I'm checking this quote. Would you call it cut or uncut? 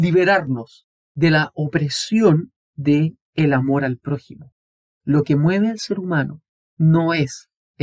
cut